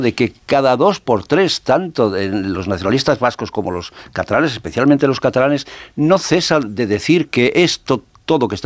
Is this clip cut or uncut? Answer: uncut